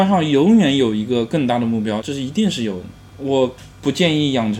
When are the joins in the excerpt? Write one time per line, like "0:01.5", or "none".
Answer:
0:02.0